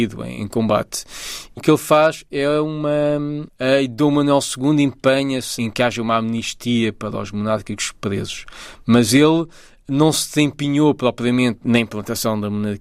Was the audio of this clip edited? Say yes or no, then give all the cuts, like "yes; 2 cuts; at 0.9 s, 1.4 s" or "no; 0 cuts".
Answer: yes; 2 cuts; at 1.6 s, 3.5 s